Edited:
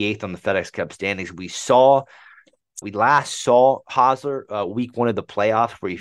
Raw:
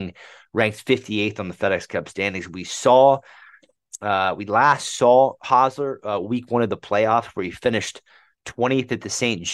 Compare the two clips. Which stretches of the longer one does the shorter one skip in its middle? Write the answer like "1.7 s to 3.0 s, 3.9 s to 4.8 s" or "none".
4.0 s to 4.4 s